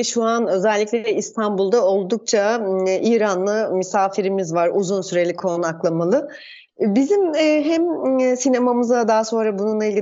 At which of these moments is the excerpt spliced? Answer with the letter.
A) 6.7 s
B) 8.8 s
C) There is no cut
A